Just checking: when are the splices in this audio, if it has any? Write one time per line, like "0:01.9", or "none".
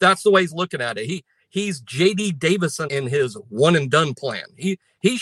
0:02.9